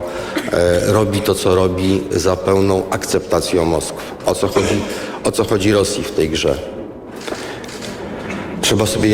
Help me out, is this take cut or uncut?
uncut